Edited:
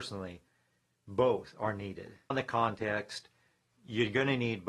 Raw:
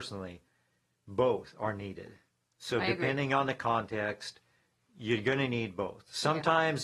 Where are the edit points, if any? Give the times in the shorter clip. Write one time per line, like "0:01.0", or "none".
0:02.3